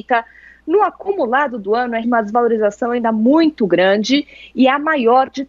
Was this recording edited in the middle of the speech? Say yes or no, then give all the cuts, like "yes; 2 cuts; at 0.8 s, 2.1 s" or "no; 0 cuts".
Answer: yes; 1 cut; at 2.0 s